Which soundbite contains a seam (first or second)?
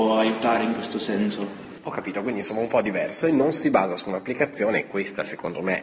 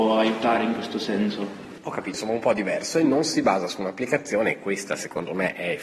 second